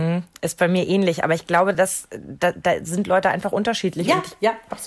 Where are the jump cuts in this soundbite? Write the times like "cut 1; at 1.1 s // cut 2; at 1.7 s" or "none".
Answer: none